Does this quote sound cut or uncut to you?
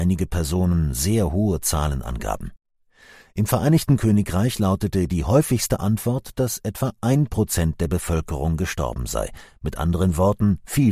uncut